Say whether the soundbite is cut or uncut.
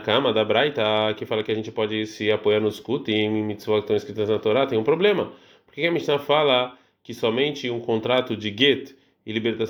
uncut